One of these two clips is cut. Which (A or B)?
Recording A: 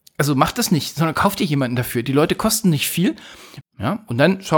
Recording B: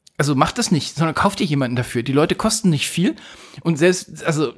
A